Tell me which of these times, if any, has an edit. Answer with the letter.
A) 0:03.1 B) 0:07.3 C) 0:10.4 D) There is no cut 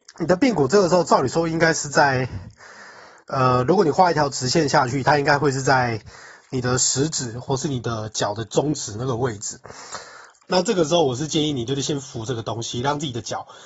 C